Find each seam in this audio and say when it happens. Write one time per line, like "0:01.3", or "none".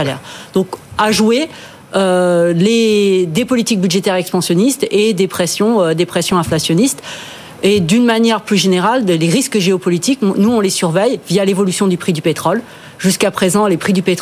none